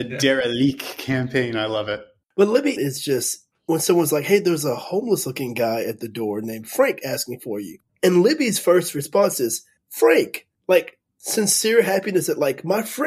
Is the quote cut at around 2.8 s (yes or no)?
yes